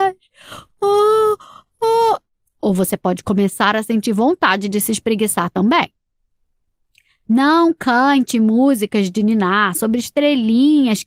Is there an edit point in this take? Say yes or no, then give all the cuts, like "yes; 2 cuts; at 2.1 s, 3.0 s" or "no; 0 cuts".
no; 0 cuts